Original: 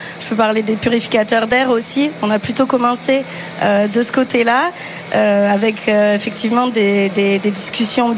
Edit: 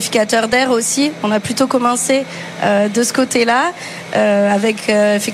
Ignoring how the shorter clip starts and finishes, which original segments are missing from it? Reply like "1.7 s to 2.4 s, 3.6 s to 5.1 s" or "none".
none